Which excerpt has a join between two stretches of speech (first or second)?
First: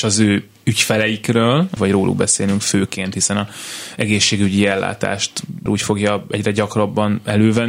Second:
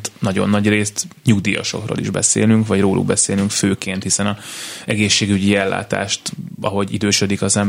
first